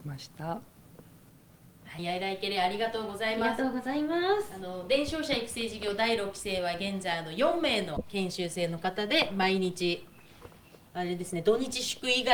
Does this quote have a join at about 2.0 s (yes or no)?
yes